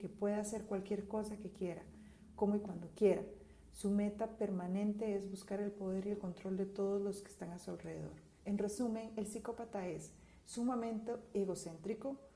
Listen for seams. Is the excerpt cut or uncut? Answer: cut